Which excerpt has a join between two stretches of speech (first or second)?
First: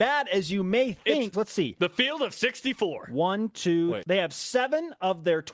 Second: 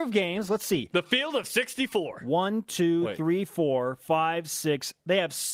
first